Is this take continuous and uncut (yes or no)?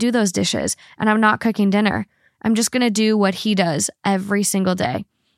yes